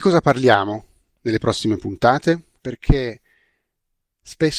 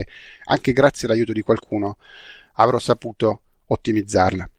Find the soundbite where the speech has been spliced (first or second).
first